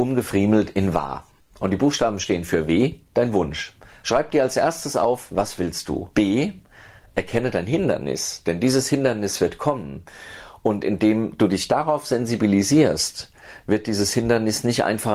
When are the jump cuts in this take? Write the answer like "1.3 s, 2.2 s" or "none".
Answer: 1.4 s, 4.0 s, 6.1 s

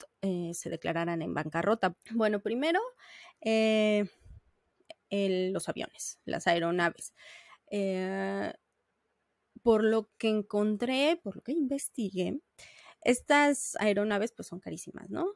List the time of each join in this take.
1.9 s, 11.2 s

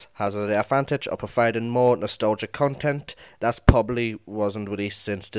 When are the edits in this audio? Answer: none

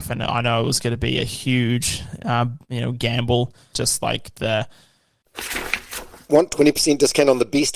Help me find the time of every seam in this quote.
3.7 s

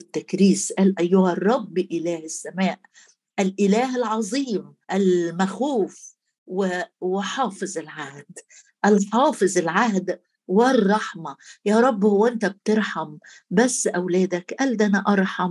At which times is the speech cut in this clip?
4.8 s

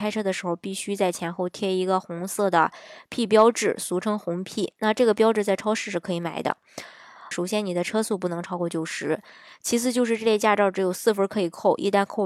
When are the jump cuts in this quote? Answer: 7.3 s

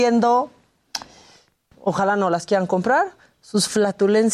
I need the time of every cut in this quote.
1.7 s

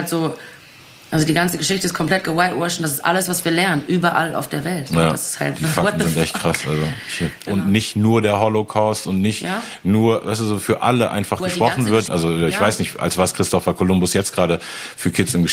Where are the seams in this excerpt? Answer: 7.5 s, 12.1 s

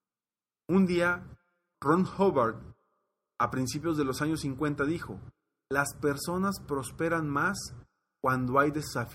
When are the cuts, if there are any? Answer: 1.7 s

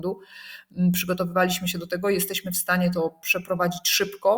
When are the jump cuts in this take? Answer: none

